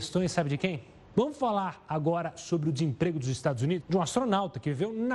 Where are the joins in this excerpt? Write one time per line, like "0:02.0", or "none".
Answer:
0:01.1
0:03.8